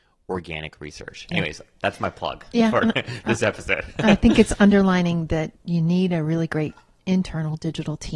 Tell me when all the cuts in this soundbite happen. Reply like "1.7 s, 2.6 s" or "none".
none